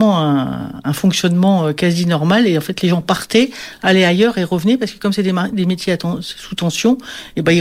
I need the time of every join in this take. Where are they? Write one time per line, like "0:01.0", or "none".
none